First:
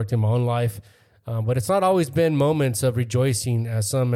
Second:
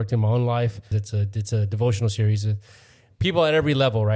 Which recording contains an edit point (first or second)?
second